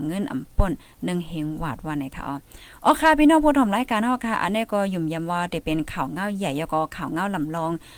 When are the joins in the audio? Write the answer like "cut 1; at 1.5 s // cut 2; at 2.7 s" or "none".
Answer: none